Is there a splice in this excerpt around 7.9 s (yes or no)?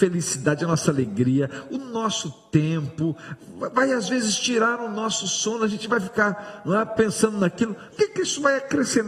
yes